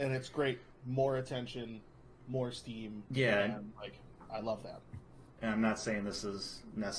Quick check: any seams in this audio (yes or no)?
yes